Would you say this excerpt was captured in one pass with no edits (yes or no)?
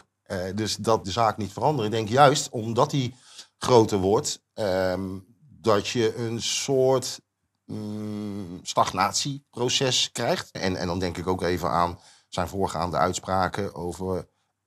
no